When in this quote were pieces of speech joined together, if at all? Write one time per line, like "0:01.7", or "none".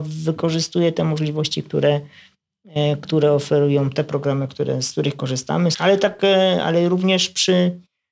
0:05.7